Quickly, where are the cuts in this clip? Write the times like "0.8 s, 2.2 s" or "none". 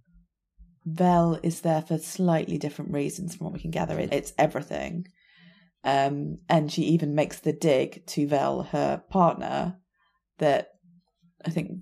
4.1 s